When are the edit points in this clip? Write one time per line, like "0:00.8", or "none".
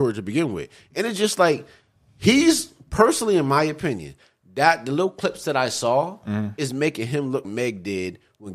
0:07.4